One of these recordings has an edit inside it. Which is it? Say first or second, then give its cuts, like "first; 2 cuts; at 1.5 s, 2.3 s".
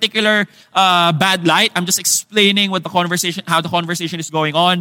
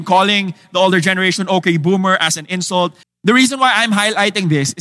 second; 1 cut; at 3.0 s